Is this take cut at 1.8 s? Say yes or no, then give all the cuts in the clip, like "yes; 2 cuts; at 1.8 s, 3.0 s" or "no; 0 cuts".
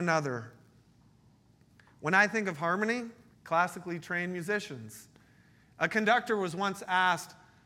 no; 1 cut; at 3.3 s